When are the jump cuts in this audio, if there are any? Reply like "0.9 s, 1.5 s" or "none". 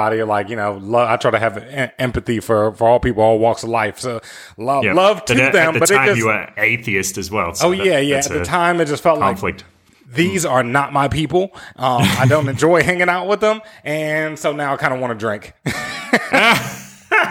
6.6 s

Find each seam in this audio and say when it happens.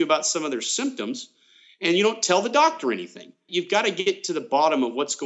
none

